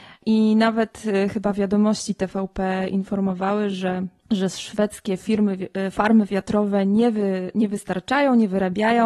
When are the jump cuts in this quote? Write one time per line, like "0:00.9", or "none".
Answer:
none